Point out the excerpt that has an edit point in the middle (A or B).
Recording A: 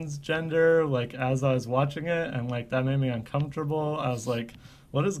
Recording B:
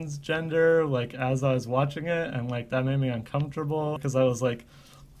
B